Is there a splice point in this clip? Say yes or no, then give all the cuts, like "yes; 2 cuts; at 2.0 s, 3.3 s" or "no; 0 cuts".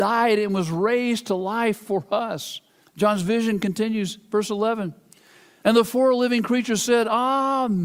yes; 2 cuts; at 2.8 s, 5.6 s